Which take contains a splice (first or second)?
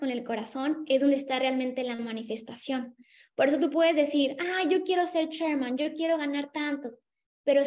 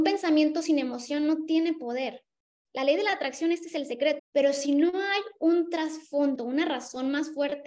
second